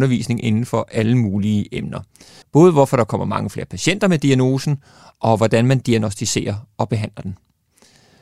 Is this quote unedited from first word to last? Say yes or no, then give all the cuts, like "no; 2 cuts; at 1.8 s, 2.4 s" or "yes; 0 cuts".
no; 1 cut; at 2.4 s